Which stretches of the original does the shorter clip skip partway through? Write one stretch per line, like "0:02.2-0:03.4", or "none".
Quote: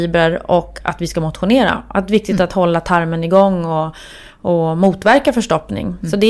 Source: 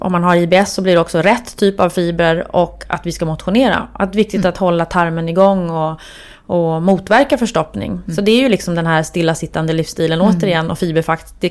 none